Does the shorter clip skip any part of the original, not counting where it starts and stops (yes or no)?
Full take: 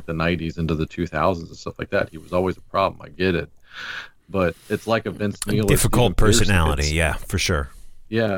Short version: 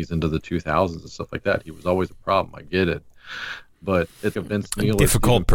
yes